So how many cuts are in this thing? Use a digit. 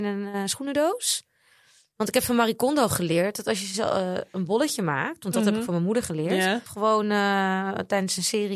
1